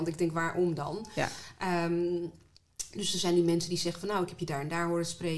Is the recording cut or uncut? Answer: uncut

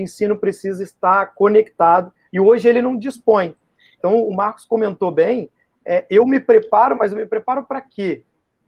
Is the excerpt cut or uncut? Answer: uncut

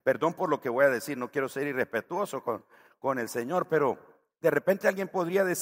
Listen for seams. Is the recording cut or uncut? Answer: uncut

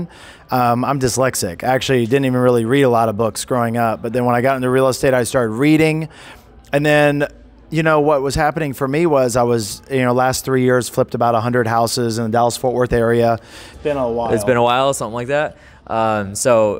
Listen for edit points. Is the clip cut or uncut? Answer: cut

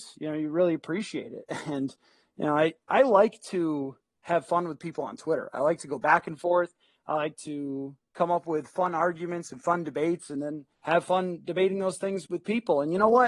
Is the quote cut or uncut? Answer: cut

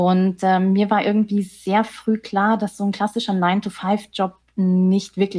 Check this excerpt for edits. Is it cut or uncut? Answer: uncut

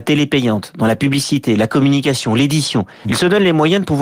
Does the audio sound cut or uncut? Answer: cut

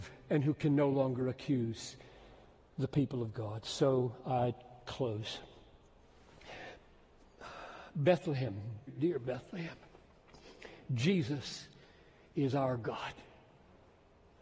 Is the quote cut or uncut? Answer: cut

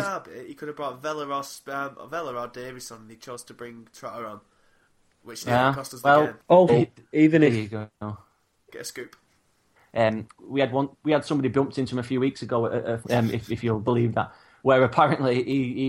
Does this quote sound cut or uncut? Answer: cut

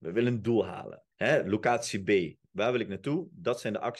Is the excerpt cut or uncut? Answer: cut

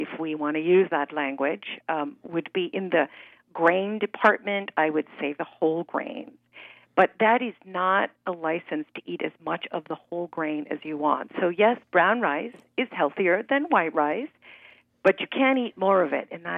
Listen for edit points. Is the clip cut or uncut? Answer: uncut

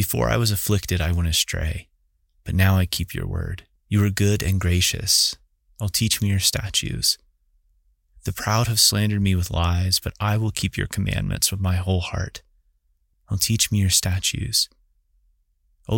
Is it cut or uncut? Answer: cut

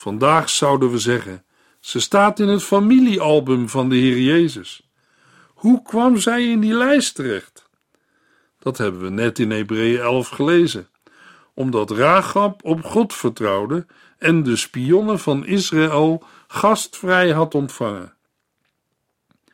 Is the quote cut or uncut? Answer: uncut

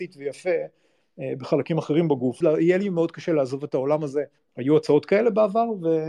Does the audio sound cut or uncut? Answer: cut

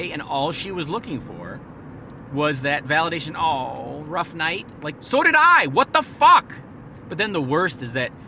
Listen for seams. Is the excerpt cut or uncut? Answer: cut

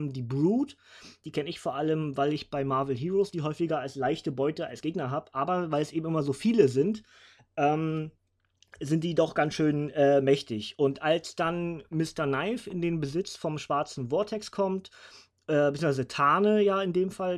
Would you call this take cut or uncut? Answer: uncut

